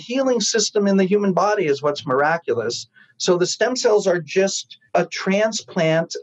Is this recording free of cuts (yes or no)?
no